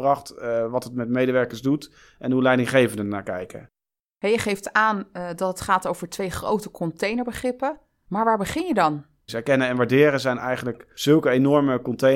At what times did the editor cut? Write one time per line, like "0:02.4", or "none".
0:09.3

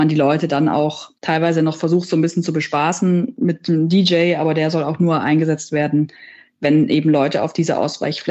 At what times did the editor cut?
none

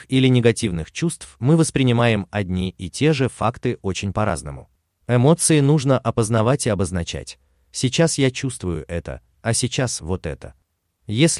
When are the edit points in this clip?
0:04.9

